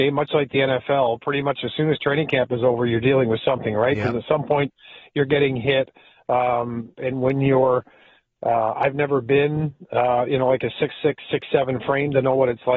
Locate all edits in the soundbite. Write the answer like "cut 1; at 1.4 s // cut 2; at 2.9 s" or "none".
cut 1; at 6.9 s